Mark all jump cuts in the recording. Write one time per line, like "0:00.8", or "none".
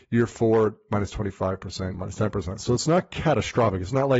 0:01.9